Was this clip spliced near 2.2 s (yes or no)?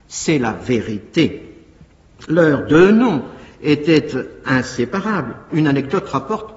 no